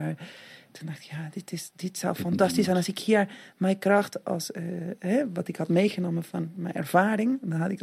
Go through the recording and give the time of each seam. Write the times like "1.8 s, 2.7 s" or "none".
none